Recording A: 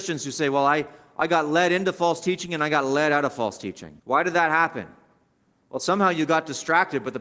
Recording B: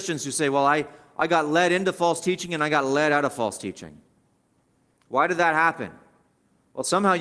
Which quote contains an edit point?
A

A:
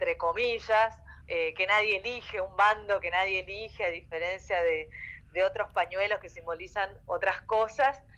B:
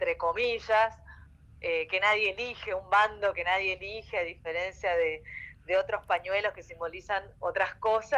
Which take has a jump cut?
A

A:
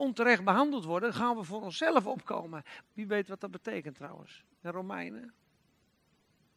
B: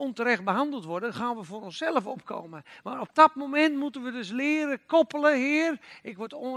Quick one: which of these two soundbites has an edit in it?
A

